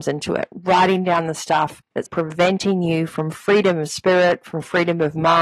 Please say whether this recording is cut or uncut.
cut